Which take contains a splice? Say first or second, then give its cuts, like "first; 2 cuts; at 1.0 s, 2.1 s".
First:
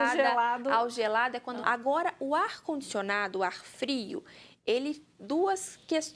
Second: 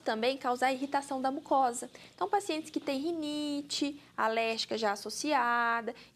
first; 1 cut; at 1.6 s